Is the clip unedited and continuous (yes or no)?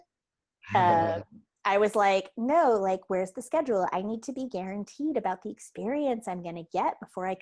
yes